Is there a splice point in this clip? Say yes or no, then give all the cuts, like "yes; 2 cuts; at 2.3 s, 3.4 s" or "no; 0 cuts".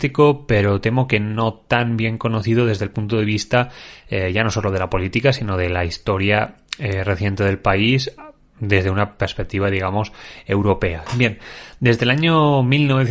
yes; 1 cut; at 11.1 s